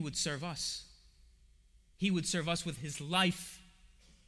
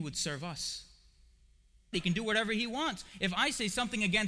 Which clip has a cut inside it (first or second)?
second